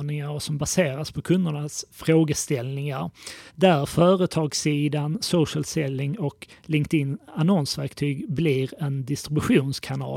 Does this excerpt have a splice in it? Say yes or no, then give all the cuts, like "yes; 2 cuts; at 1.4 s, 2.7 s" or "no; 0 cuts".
yes; 1 cut; at 3.5 s